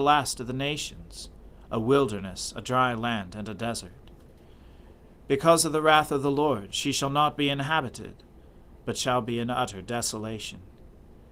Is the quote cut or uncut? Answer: uncut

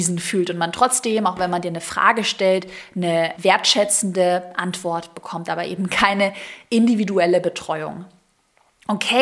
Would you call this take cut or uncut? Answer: cut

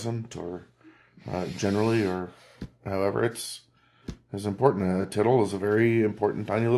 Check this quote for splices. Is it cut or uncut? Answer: uncut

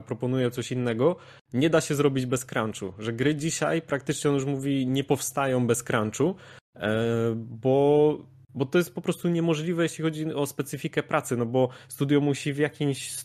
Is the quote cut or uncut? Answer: uncut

